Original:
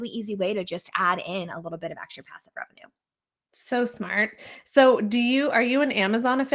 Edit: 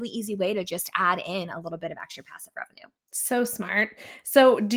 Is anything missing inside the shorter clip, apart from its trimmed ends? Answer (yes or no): yes